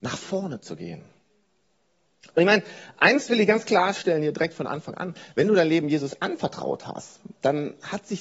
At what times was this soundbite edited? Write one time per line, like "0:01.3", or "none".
none